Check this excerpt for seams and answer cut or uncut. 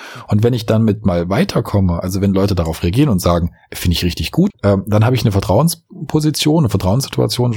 cut